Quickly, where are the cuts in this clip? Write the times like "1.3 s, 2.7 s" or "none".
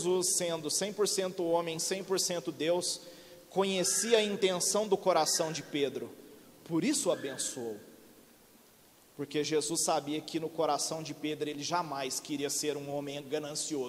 none